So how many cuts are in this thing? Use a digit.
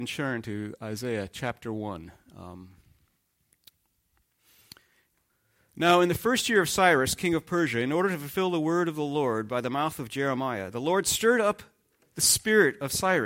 0